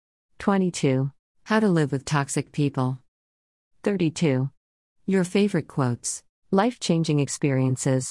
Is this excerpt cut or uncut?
cut